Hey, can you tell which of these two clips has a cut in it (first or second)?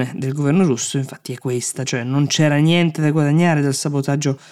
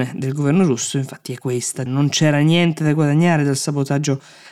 second